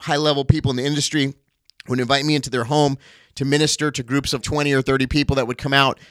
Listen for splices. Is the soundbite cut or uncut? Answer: cut